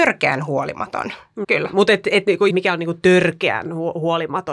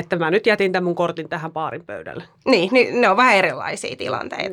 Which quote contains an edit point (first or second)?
first